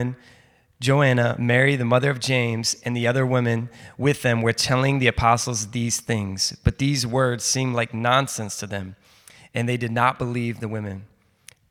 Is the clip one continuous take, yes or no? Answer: yes